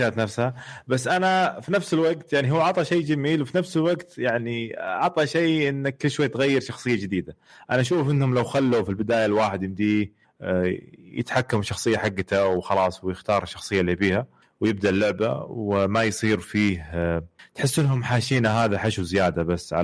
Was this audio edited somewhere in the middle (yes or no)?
no